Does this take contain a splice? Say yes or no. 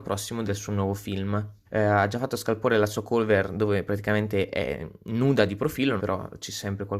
yes